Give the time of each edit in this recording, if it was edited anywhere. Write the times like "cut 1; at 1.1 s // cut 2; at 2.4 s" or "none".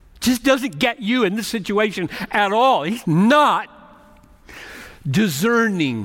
cut 1; at 3.0 s